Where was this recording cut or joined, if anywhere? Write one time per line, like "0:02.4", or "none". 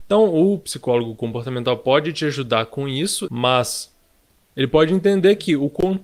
0:03.3